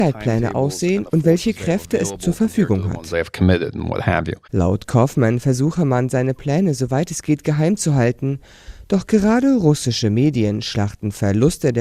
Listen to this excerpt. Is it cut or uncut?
cut